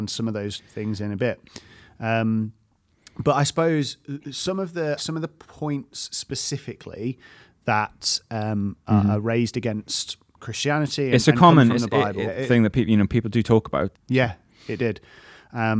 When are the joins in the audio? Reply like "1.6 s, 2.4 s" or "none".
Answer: 5.0 s, 12.3 s, 13.9 s